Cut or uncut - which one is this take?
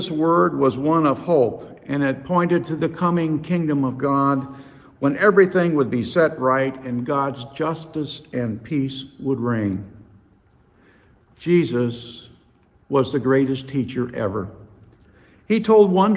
uncut